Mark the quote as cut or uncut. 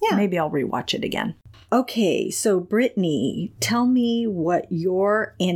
uncut